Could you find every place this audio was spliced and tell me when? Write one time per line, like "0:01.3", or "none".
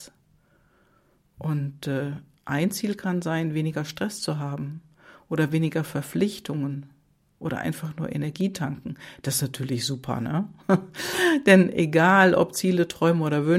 none